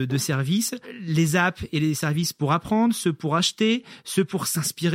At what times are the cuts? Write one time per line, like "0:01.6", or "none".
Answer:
none